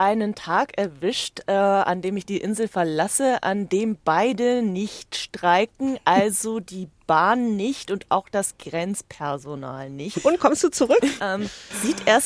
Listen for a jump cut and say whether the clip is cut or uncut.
cut